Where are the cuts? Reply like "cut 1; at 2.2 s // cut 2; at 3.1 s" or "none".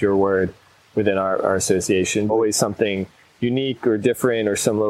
cut 1; at 2.3 s